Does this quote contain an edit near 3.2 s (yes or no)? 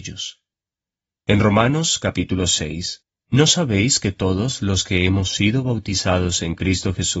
yes